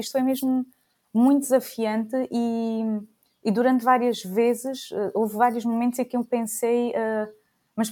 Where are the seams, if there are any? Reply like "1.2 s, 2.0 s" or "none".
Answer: none